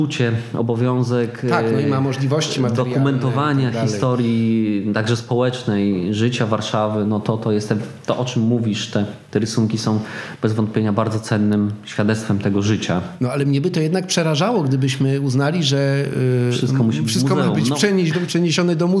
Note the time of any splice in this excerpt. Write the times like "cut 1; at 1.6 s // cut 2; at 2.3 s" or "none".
none